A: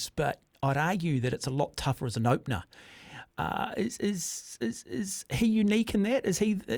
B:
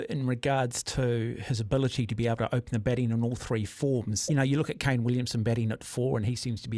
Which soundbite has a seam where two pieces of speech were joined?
B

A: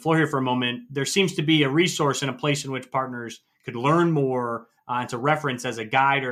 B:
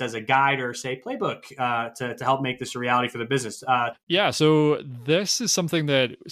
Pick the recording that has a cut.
B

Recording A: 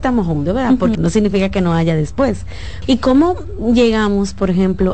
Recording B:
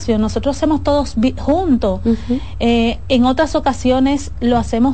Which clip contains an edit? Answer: A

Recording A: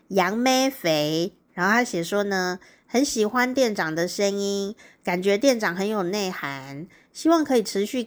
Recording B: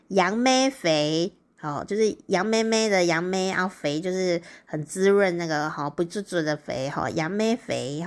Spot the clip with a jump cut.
A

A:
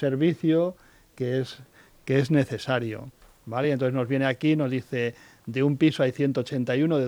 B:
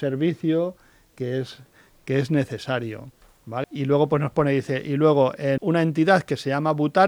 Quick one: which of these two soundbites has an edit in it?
B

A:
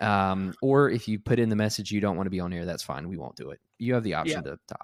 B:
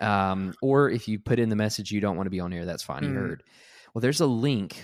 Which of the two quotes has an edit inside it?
B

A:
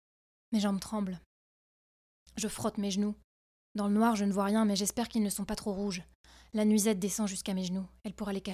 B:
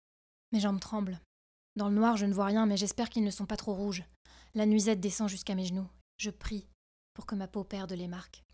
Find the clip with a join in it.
B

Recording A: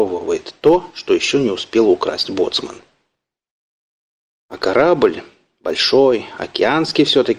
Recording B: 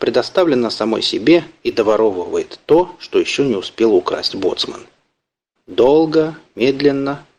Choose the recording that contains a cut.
B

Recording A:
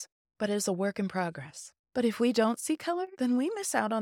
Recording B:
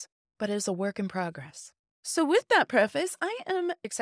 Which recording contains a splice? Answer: A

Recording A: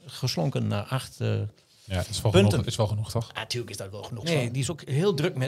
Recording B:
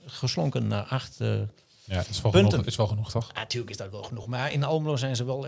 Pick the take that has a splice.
A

